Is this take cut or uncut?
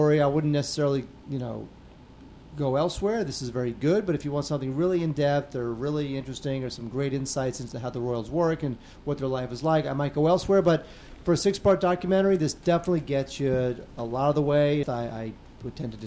cut